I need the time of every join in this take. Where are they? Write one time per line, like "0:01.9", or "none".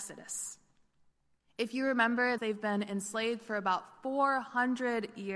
0:02.4